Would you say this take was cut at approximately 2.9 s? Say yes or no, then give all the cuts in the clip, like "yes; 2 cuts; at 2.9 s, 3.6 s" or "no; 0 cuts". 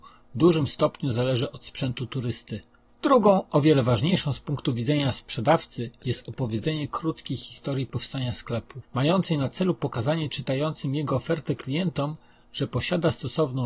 yes; 2 cuts; at 2.9 s, 8.8 s